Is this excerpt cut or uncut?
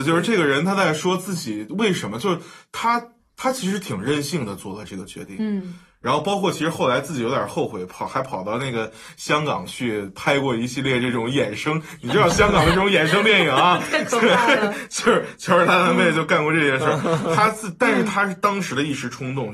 uncut